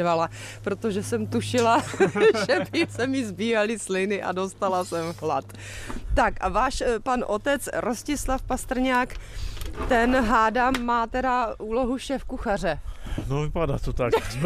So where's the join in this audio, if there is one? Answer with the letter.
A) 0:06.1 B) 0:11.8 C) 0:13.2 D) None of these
D